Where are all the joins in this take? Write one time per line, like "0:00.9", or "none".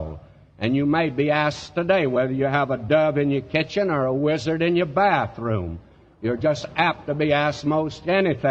none